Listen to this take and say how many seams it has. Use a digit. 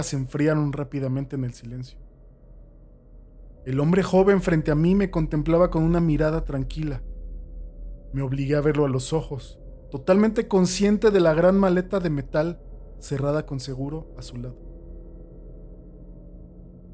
1